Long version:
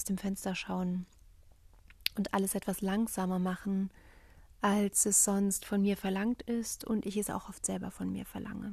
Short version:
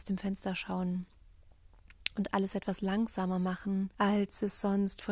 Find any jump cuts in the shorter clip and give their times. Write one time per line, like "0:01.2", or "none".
0:03.9